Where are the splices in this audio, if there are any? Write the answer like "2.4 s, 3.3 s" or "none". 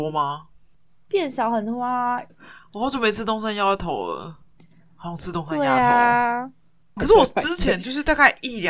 2.3 s, 7.0 s